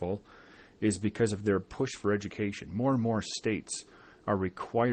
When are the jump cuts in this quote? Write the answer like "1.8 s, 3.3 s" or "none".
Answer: none